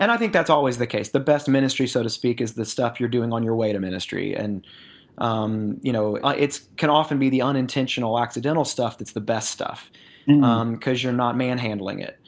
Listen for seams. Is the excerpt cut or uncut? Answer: cut